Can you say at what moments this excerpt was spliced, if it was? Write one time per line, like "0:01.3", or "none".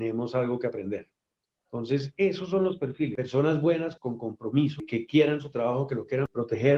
0:04.0